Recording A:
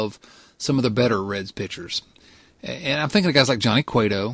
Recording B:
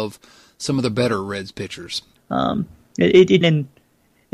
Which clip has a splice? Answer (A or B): B